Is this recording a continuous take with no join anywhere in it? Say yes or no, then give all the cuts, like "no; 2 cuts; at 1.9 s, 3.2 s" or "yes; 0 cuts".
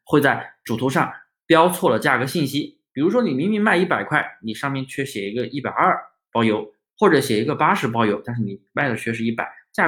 yes; 0 cuts